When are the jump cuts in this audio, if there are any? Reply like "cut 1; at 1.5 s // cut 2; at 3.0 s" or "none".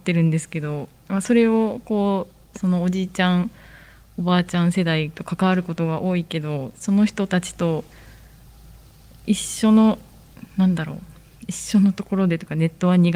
cut 1; at 2.5 s